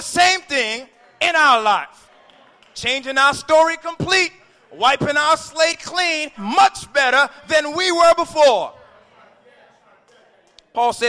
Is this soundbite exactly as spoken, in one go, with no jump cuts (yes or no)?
no